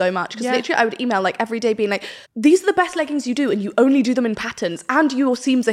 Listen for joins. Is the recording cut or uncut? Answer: cut